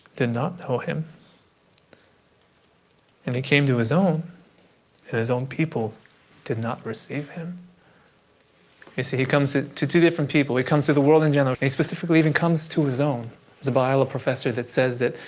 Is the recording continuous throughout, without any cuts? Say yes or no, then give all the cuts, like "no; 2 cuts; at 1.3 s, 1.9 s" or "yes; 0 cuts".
no; 1 cut; at 11.5 s